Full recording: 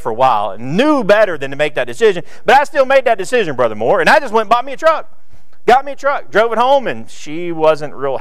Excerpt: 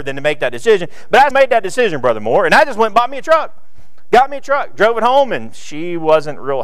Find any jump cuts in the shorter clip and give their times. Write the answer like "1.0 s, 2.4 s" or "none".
1.3 s

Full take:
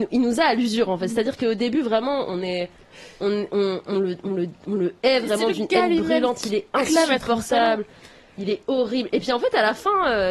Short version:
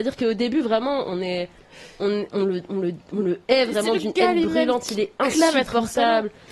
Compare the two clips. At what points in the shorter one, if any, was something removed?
2.3 s

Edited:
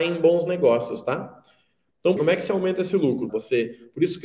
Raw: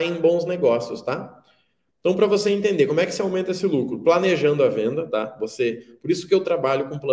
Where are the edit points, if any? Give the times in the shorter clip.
2.2 s, 3.3 s

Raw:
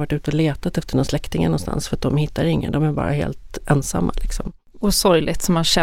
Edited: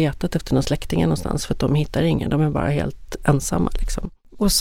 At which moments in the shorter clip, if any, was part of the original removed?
none

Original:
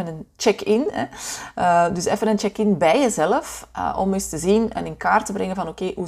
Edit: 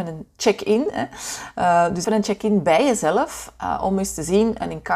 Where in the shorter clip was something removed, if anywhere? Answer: 2.0 s

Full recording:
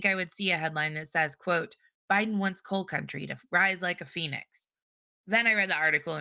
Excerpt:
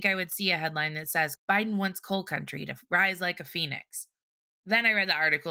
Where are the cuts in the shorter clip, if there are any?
1.4 s

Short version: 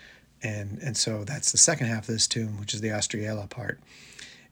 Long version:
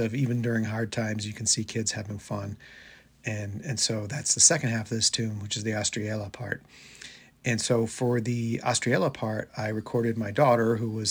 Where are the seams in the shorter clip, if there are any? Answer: none

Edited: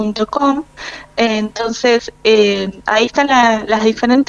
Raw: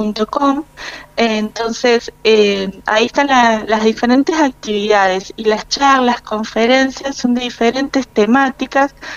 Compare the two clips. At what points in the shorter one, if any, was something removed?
none

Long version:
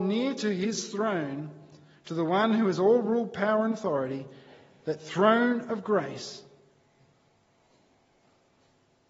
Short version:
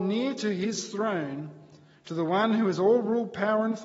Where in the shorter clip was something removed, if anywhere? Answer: none

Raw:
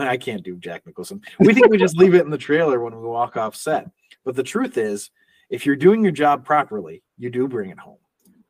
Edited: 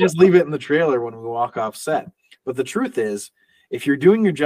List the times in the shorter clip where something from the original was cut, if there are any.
none

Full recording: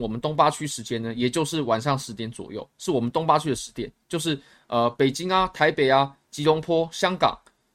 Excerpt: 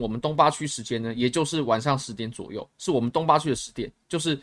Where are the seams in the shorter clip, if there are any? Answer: none

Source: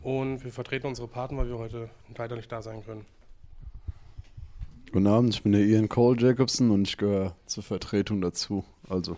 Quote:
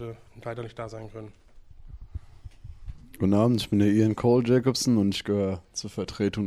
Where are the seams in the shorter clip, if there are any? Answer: none

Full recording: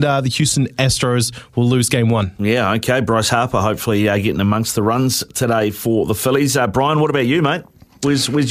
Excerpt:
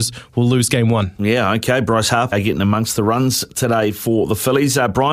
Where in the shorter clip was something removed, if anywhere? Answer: 2.3 s

